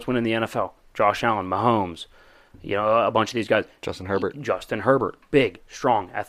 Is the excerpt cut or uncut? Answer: uncut